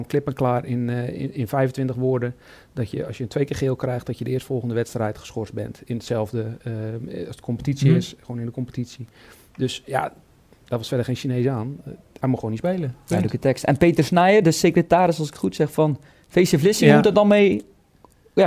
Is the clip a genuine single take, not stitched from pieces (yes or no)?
yes